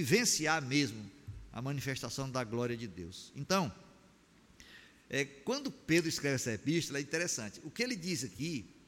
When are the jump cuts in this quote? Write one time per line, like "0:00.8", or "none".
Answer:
none